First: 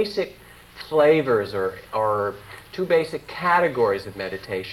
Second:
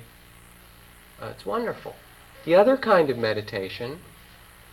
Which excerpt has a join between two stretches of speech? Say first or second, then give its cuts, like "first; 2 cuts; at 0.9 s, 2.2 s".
second; 1 cut; at 2.3 s